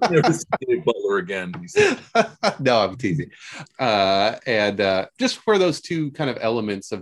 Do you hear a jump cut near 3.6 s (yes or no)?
yes